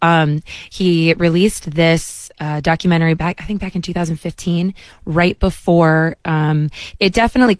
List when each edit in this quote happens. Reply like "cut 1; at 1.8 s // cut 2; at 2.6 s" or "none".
none

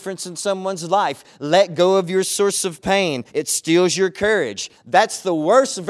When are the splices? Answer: cut 1; at 3.3 s // cut 2; at 4.7 s

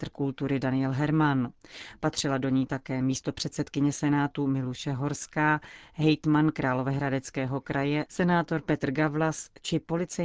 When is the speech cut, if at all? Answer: cut 1; at 8.1 s

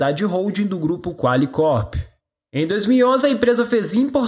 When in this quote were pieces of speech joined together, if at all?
none

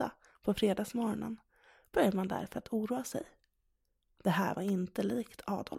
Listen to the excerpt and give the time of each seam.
none

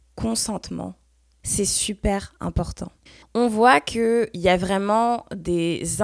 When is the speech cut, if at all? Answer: cut 1; at 3.2 s

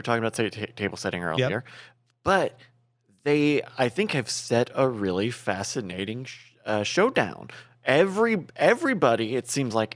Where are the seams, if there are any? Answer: none

